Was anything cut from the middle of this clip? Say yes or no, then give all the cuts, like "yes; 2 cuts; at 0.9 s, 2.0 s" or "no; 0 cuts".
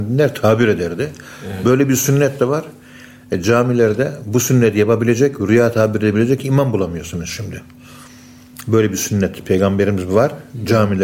no; 0 cuts